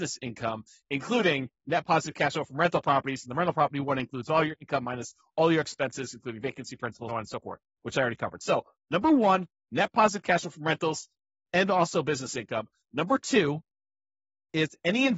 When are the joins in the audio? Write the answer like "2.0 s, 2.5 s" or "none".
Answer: 7.1 s